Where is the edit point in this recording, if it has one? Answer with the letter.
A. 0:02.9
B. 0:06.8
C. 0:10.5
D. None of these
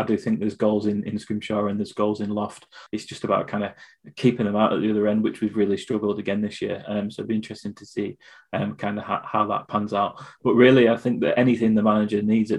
A